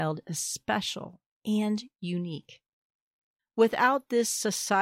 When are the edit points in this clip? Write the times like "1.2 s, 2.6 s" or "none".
3.4 s